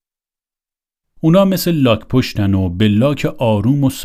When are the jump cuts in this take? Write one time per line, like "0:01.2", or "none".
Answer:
0:01.0